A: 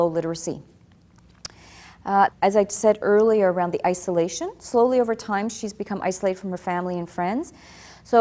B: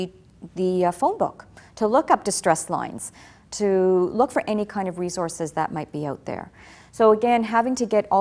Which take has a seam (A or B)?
A